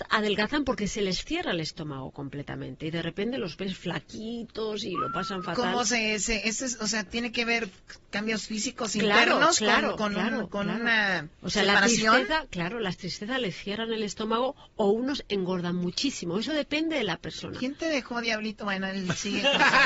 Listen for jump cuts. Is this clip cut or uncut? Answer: uncut